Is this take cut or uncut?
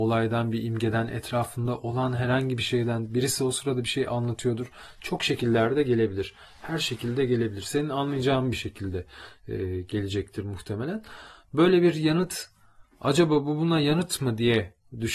uncut